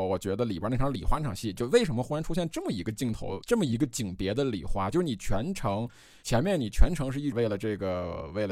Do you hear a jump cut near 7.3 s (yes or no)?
yes